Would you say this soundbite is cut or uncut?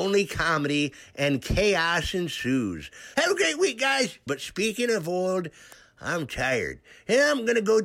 cut